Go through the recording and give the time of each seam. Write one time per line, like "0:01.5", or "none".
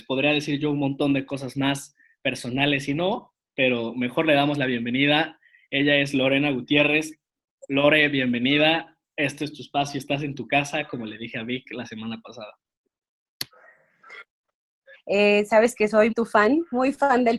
0:14.9
0:16.1